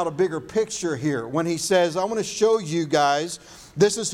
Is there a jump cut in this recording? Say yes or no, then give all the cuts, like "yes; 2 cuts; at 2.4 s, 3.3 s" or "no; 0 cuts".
no; 0 cuts